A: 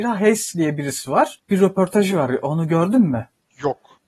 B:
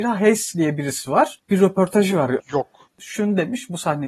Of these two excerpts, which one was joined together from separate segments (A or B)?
B